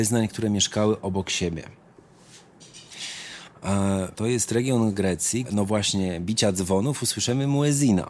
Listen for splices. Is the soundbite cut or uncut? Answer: cut